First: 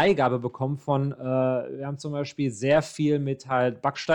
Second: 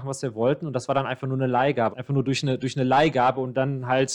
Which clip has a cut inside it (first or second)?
second